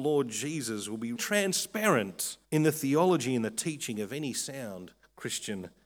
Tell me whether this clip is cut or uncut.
cut